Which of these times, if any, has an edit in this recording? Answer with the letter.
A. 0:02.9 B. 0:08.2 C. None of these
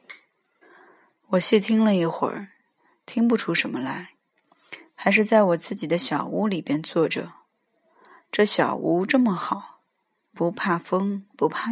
C